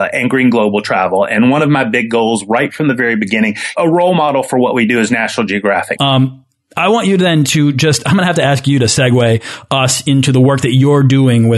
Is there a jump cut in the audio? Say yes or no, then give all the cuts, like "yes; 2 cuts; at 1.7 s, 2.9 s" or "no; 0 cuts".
yes; 2 cuts; at 3.7 s, 6.0 s